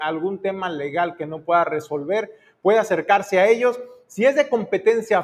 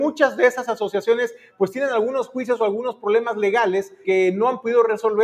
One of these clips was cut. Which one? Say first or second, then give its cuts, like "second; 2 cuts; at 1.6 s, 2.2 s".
second; 1 cut; at 4.0 s